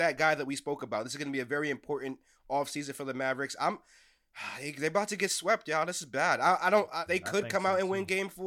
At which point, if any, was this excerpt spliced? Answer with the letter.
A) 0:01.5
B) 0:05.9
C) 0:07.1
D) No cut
C